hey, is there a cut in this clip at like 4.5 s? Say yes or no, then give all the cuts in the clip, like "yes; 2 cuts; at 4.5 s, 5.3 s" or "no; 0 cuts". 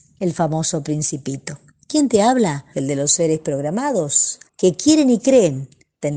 yes; 2 cuts; at 2.7 s, 4.5 s